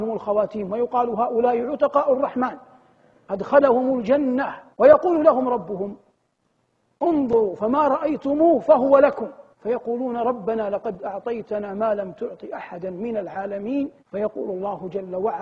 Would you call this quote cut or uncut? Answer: cut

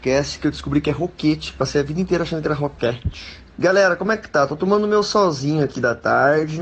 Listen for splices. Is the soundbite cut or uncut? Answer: uncut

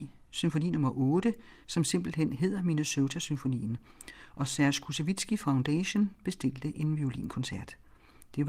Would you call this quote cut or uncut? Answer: uncut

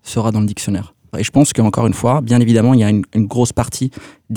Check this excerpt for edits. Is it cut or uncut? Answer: cut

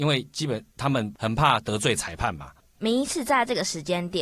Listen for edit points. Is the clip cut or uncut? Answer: cut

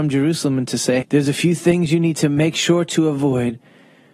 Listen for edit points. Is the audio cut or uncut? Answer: cut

